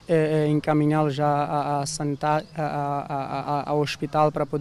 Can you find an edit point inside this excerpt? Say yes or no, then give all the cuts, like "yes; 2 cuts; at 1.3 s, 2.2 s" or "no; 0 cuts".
no; 0 cuts